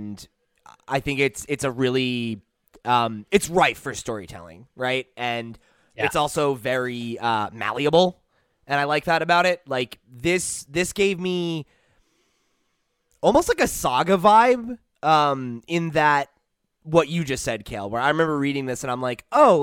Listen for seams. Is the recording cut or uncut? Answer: uncut